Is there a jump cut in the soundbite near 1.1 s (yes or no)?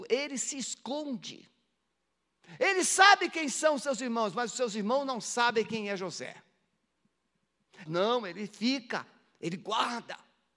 no